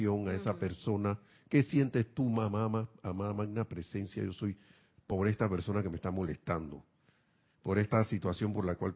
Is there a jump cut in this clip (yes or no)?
no